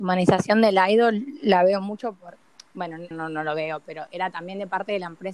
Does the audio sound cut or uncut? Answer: cut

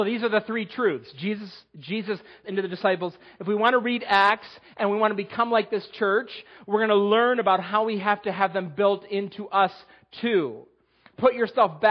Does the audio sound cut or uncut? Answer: cut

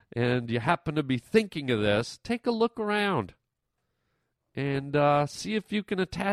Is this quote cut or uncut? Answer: uncut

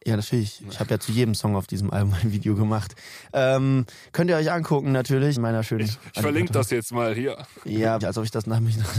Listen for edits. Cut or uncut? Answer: cut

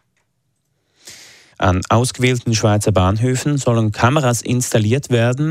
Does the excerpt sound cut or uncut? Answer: cut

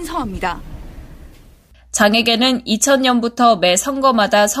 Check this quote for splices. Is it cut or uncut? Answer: cut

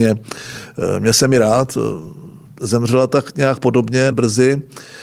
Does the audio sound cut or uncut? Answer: cut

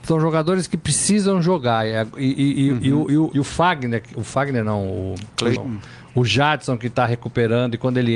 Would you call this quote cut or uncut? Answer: cut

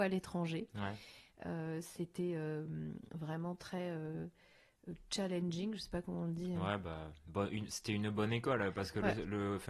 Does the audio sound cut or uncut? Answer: uncut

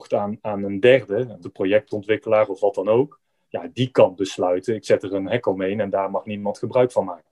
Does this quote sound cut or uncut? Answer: cut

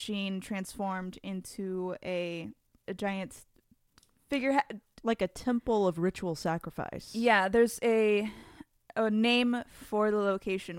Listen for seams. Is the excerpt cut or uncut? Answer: cut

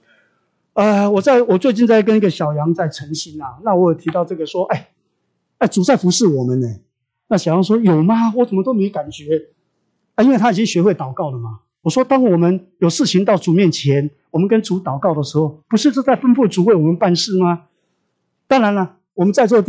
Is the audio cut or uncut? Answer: uncut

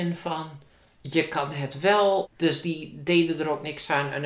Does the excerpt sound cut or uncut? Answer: cut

